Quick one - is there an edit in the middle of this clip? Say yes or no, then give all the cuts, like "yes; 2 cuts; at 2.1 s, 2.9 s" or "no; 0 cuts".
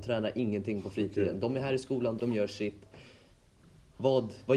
yes; 1 cut; at 2.2 s